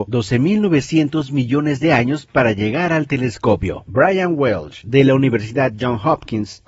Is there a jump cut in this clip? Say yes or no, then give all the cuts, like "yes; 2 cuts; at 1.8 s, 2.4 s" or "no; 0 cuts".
no; 0 cuts